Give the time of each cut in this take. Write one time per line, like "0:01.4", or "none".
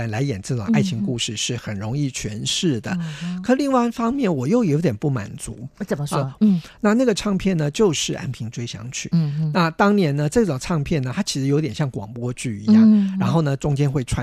0:06.4